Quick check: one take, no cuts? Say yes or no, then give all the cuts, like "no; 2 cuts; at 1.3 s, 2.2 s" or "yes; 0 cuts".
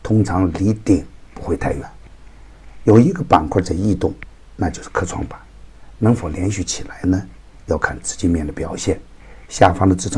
yes; 0 cuts